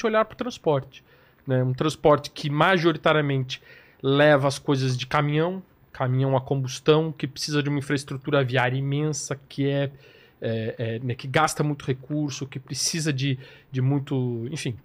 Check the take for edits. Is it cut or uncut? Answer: uncut